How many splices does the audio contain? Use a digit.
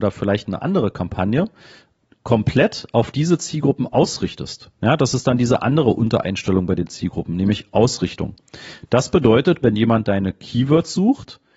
1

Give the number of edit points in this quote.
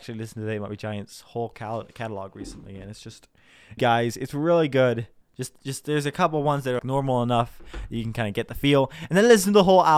3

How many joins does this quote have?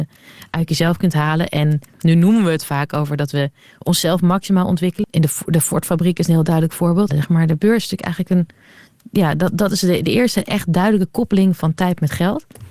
2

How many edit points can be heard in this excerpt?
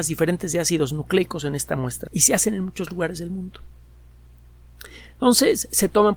1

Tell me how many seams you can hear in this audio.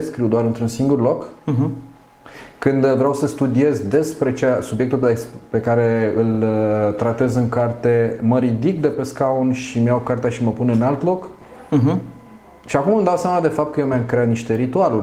0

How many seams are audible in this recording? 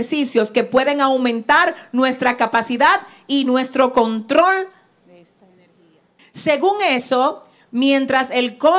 1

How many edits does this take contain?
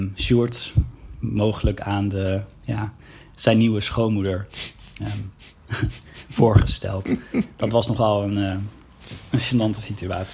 0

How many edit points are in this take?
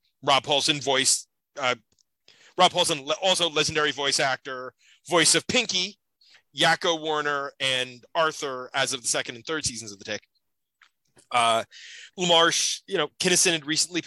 1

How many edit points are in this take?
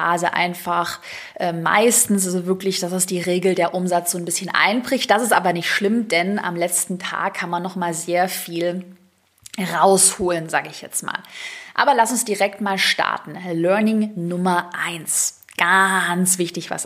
0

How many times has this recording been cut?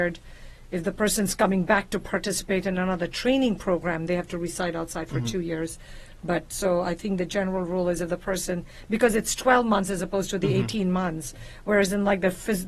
1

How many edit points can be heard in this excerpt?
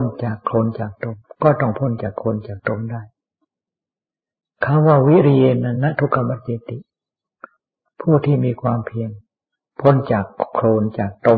1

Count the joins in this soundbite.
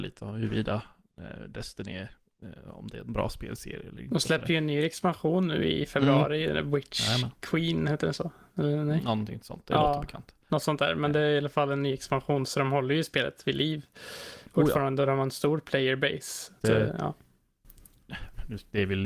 1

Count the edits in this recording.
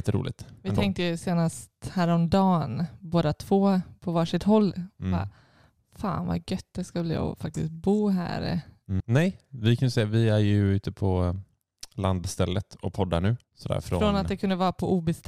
2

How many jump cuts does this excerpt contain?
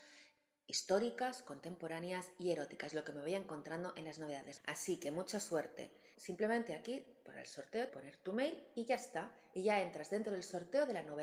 3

